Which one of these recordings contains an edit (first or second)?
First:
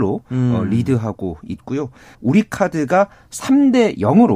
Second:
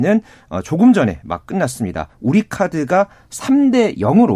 first